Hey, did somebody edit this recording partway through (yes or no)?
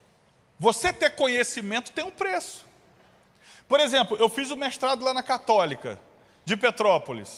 no